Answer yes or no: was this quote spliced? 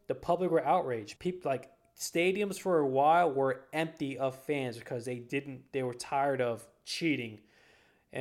yes